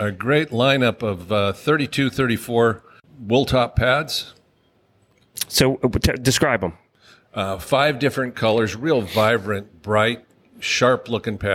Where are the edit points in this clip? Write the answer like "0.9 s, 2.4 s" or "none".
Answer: none